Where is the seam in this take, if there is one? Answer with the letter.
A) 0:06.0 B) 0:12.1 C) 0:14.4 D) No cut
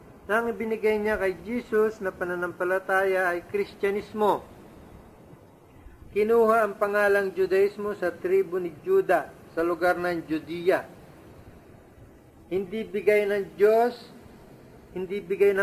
A